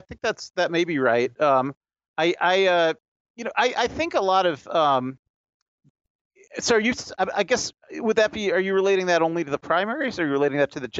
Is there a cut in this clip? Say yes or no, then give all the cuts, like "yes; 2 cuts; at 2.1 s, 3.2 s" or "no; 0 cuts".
no; 0 cuts